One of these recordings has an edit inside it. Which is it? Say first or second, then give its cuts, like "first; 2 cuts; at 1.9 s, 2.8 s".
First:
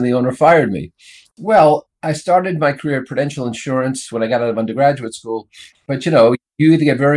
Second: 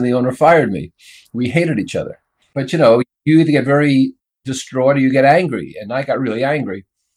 first; 2 cuts; at 1.3 s, 5.7 s